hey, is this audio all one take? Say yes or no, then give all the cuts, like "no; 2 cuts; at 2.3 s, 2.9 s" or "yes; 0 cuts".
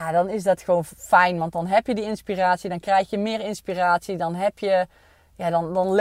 yes; 0 cuts